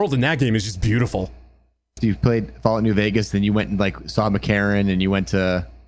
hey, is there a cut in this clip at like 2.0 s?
yes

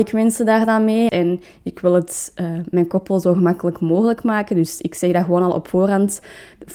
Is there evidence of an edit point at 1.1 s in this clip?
yes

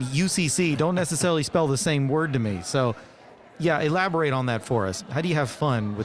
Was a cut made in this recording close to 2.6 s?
no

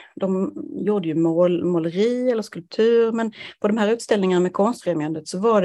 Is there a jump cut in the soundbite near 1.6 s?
no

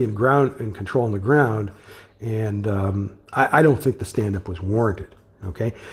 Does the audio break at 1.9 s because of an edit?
no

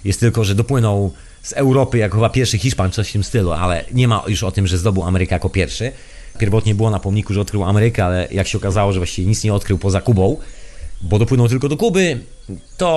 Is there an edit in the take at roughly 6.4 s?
yes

